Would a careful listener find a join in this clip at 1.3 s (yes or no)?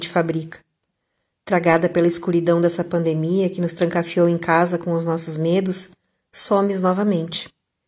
no